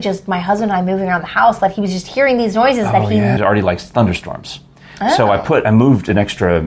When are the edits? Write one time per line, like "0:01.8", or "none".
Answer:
0:03.4